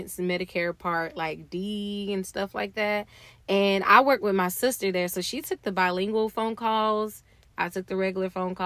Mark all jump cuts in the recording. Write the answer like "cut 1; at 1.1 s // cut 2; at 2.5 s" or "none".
none